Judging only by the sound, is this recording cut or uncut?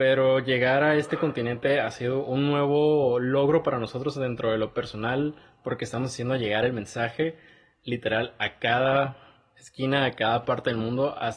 uncut